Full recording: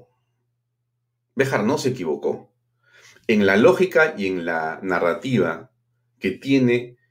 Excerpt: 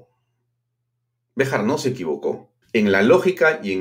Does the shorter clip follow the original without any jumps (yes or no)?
no